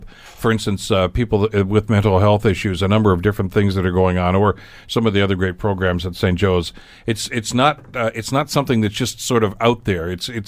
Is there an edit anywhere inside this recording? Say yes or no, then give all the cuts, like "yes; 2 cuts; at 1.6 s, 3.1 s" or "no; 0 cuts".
no; 0 cuts